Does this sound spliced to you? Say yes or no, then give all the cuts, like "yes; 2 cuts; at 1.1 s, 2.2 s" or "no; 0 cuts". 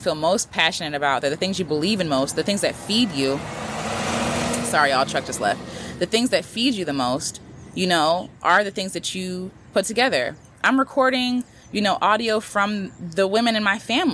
no; 0 cuts